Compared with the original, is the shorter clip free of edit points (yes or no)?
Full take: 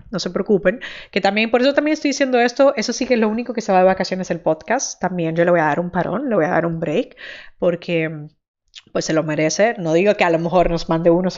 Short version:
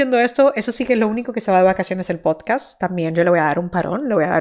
yes